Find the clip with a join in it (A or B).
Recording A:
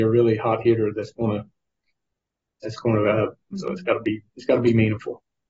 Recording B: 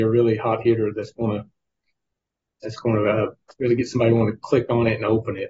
A